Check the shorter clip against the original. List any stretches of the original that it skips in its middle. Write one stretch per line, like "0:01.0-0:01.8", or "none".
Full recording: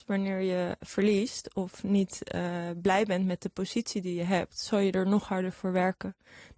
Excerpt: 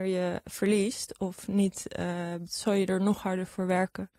0:02.8-0:04.5